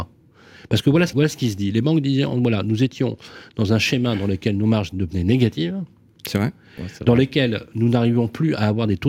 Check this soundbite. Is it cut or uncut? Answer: cut